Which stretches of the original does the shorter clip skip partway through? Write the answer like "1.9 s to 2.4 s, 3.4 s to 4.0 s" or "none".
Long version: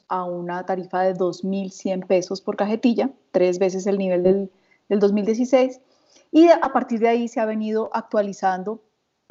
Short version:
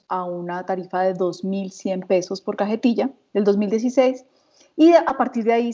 3.3 s to 4.8 s